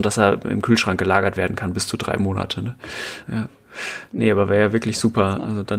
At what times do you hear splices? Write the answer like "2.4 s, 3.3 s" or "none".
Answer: 3.2 s